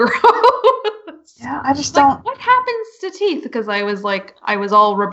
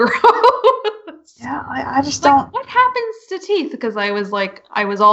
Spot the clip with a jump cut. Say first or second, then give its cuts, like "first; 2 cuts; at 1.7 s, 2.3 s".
first; 1 cut; at 1.6 s